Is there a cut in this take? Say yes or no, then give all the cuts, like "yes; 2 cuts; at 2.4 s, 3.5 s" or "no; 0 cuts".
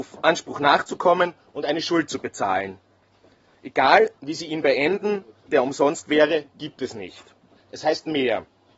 yes; 2 cuts; at 5.5 s, 7.6 s